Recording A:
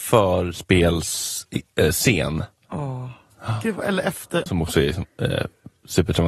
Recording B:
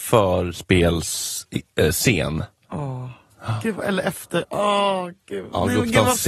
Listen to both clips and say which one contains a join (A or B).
A